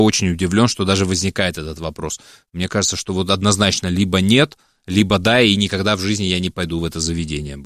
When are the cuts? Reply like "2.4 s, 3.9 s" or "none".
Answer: none